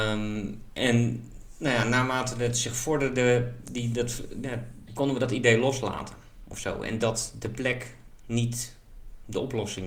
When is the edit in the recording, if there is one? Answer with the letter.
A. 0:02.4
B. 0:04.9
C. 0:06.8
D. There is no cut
B